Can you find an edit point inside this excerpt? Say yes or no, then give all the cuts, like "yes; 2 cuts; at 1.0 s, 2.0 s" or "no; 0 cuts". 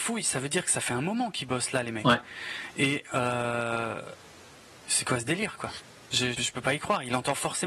yes; 2 cuts; at 4.7 s, 6.3 s